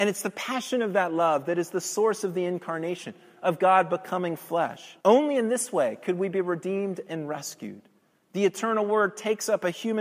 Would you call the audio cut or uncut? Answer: cut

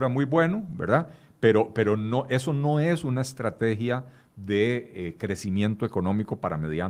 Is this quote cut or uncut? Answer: uncut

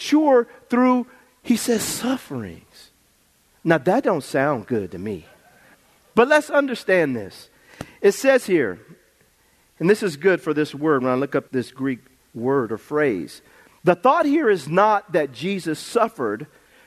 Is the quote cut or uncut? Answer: cut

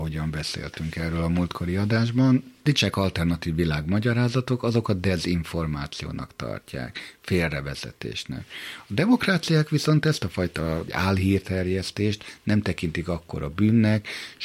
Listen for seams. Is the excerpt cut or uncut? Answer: uncut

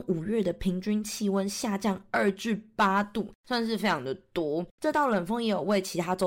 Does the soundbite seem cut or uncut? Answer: cut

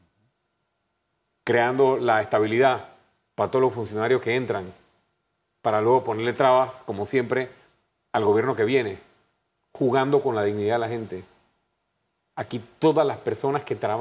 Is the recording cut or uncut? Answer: uncut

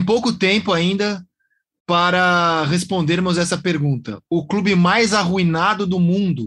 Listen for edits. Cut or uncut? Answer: uncut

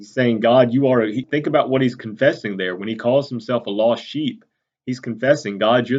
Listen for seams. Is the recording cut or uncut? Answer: cut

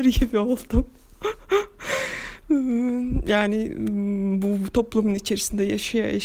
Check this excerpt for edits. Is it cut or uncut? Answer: uncut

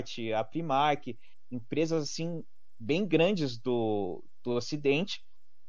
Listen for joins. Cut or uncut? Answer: uncut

